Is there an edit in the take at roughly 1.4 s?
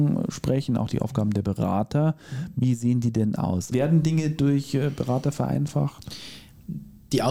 no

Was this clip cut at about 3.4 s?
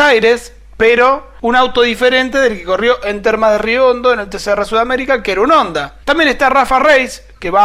no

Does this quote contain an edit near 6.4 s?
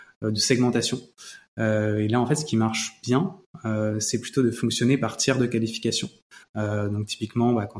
yes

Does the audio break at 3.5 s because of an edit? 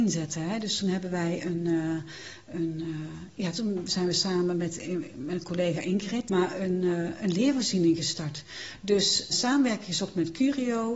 no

